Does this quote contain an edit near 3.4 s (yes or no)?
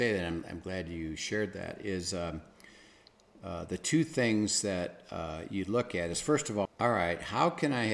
no